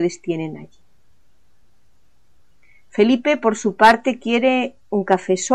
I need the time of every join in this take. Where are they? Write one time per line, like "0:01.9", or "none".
none